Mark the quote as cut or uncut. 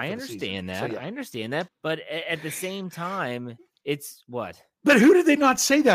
cut